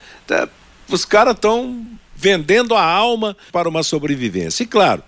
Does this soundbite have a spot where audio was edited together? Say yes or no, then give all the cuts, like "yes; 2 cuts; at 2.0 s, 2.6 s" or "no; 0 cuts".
yes; 2 cuts; at 2.1 s, 3.5 s